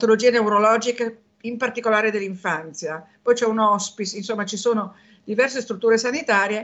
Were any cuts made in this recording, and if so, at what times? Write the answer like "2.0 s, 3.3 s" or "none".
none